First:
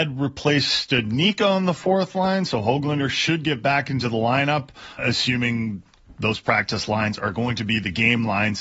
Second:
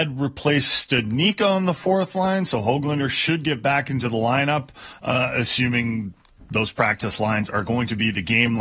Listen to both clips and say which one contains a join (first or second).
first